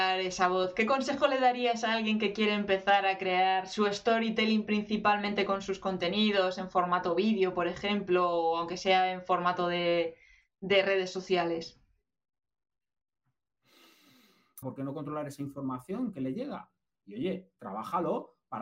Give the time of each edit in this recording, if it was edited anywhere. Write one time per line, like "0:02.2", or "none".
0:14.6
0:16.9